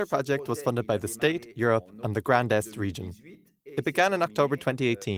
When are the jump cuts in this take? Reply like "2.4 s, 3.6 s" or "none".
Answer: none